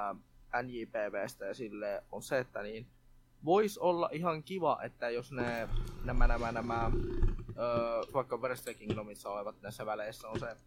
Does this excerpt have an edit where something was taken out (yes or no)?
yes